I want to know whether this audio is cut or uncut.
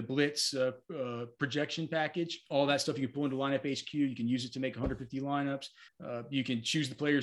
cut